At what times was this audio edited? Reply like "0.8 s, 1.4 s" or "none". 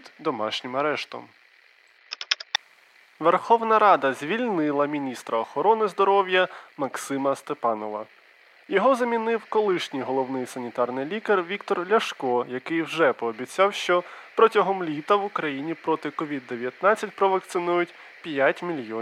none